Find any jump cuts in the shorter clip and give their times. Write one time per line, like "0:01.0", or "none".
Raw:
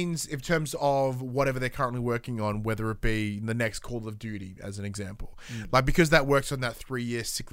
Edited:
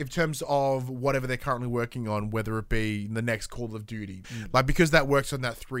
0:04.2